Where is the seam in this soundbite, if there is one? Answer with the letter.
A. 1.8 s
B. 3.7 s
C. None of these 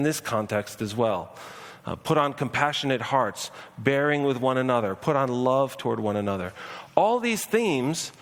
C